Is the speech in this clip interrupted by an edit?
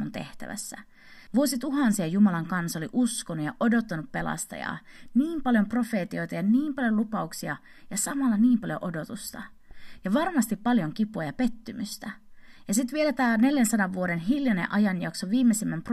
yes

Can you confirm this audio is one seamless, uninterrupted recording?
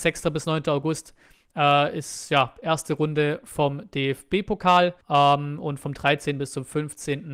no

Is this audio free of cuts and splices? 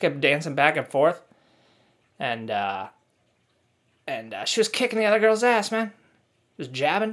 yes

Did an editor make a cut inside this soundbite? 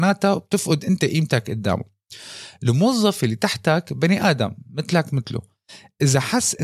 no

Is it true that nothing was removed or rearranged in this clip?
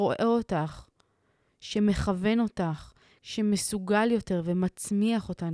no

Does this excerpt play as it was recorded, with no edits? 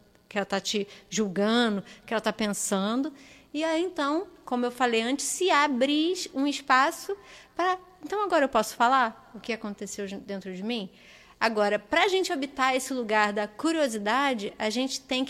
yes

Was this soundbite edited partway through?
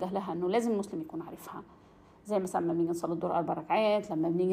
no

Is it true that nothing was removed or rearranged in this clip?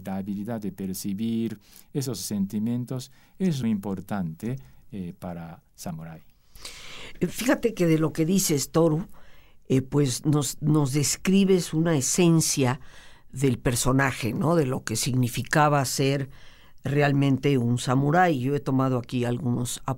no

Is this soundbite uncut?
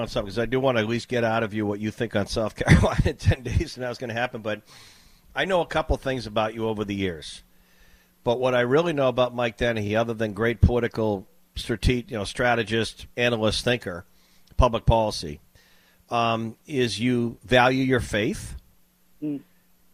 yes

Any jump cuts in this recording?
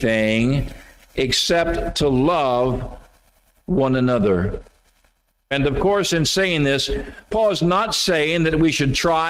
yes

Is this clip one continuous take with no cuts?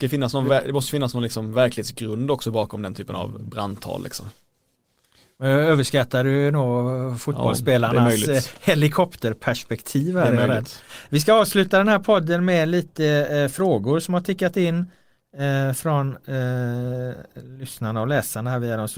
yes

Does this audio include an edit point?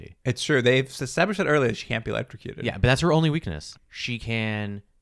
yes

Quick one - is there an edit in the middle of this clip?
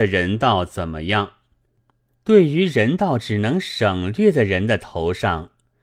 yes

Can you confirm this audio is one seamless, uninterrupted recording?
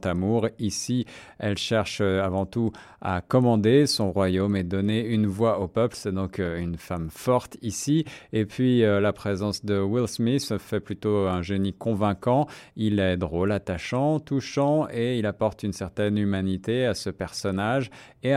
yes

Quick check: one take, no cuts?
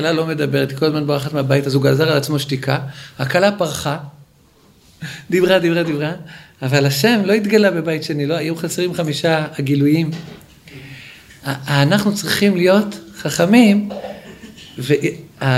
yes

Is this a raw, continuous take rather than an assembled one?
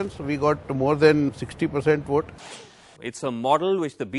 no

